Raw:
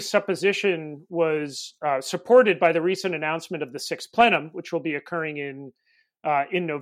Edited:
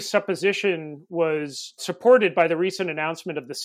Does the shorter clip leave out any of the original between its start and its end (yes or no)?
yes